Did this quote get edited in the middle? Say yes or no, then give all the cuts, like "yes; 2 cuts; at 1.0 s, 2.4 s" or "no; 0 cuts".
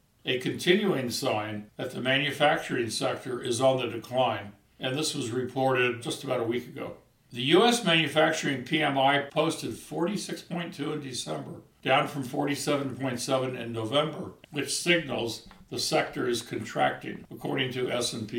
yes; 1 cut; at 14.4 s